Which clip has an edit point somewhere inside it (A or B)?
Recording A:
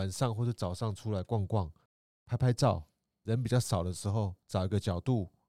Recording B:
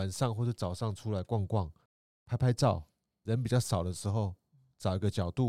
A